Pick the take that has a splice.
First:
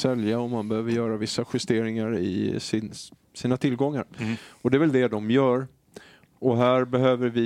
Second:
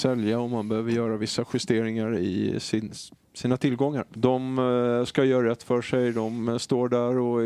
second; 1 cut; at 4.1 s

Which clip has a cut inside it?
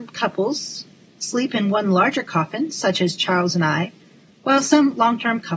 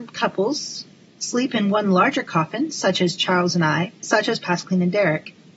second; 1 cut; at 4.0 s

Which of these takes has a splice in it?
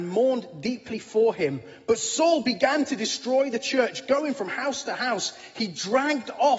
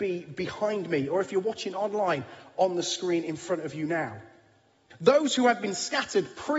second; 1 cut; at 4.9 s

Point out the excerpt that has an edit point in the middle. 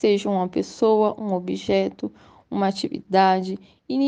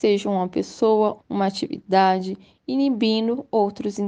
second; 1 cut; at 1.2 s

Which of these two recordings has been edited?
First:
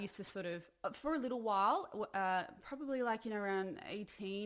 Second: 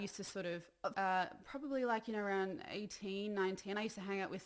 second; 1 cut; at 0.9 s

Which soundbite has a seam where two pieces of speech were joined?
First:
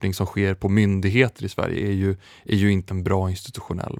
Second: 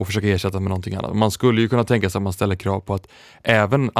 first; 1 cut; at 2.9 s

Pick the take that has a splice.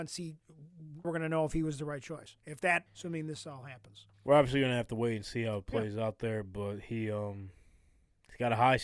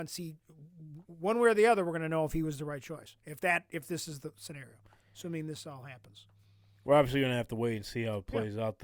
first; 3 cuts; at 1.0 s, 2.9 s, 4.1 s

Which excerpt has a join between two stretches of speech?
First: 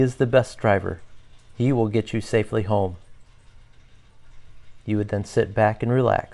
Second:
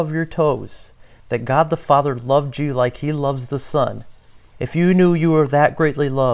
second; 1 cut; at 4.5 s

